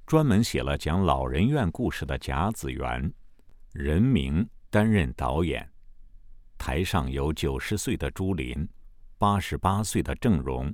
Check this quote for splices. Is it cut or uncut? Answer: uncut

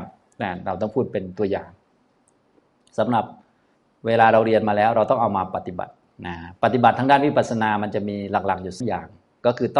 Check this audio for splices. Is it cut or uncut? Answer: cut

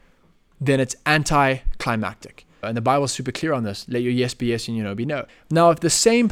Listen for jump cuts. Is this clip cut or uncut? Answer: cut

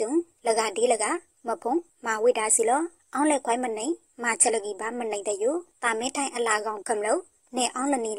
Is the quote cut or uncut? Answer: cut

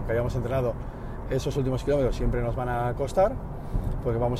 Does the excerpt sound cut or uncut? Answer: uncut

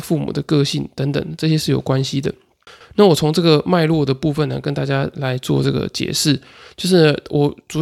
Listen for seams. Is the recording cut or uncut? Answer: cut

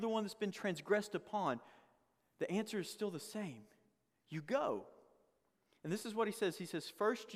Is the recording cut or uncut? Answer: uncut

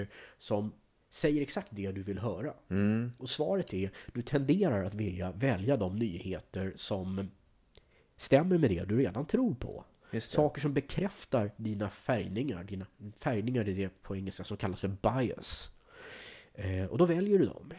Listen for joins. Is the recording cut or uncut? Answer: uncut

